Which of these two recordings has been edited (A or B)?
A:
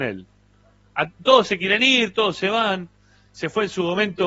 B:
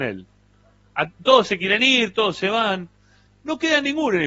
B